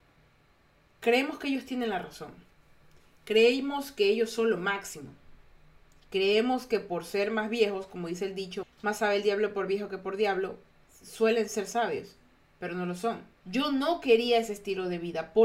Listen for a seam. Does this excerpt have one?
yes; 2 cuts; at 8.6 s, 13.4 s

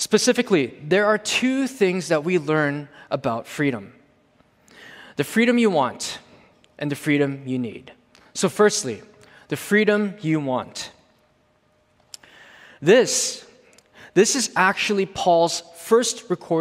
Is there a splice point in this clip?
no; 0 cuts

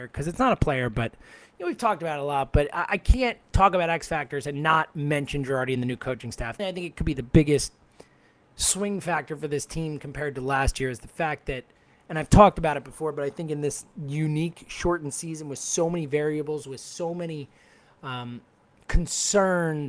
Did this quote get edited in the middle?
yes; 1 cut; at 6.6 s

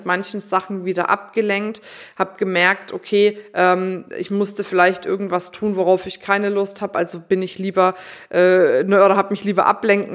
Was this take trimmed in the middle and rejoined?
no; 0 cuts

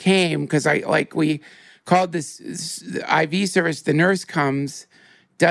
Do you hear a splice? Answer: no; 0 cuts

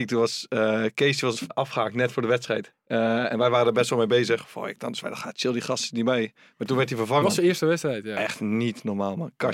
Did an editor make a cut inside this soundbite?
yes; 3 cuts; at 1.5 s, 2.7 s, 7.2 s

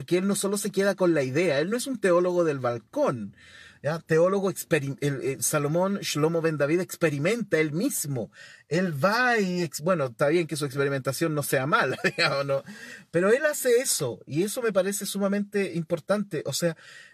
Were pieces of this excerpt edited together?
no; 0 cuts

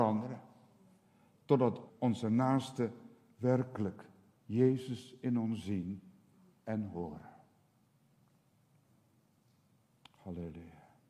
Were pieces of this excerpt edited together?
yes; 1 cut; at 1.9 s

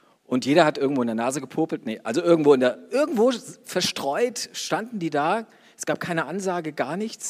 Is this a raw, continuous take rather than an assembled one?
yes; 0 cuts

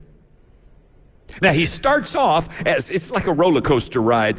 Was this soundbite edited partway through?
no; 0 cuts

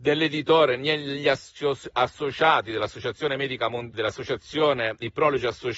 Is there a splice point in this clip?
yes; 1 cut; at 3.9 s

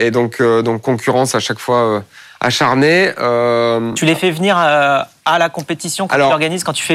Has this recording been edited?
no; 0 cuts

